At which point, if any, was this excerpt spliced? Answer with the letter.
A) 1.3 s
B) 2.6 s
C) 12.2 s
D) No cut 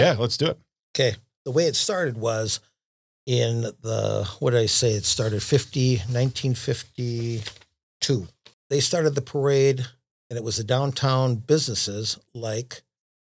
D